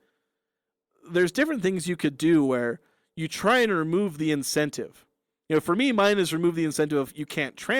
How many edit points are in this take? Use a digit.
0